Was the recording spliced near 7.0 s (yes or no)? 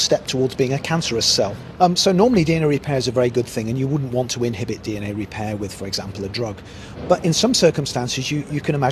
no